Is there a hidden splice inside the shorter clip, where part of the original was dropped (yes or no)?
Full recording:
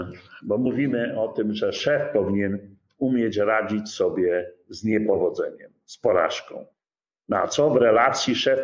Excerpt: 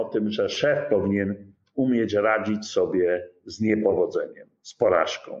no